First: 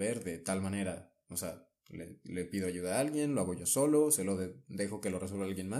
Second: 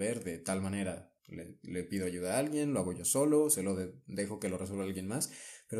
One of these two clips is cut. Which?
second; 1 cut; at 1.2 s

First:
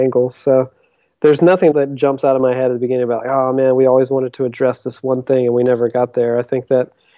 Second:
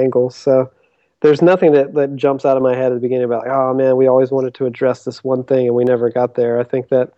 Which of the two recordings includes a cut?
first; 1 cut; at 1.7 s

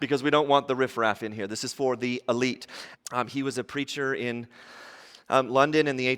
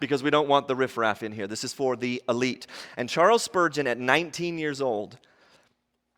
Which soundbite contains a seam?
first; 1 cut; at 2.9 s

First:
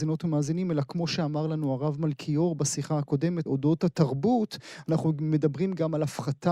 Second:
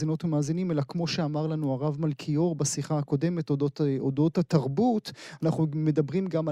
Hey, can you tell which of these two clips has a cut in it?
first; 1 cut; at 3.5 s

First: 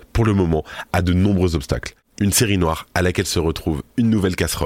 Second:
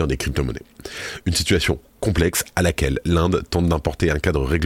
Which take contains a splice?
first; 1 cut; at 2.2 s

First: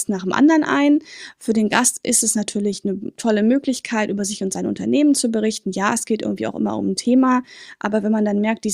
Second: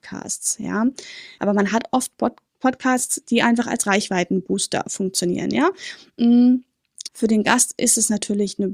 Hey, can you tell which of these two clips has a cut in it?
second; 2 cuts; at 1.4 s, 7.1 s

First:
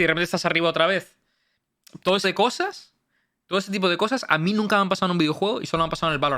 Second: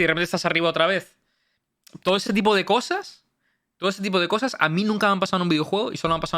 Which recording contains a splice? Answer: first; 1 cut; at 2.2 s

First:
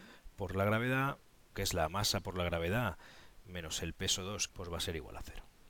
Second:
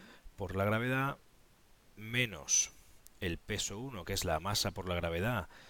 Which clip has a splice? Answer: first; 2 cuts; at 1.5 s, 4.5 s

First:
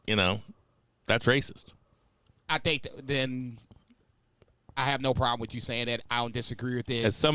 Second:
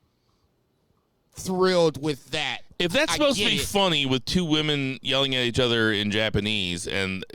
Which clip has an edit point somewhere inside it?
first; 1 cut; at 2.4 s

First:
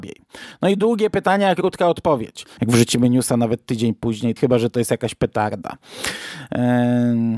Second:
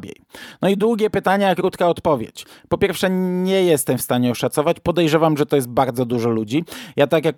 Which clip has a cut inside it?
first; 2 cuts; at 2.6 s, 4.4 s

